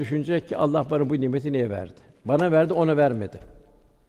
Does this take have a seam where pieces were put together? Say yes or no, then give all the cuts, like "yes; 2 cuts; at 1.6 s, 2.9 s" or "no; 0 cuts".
no; 0 cuts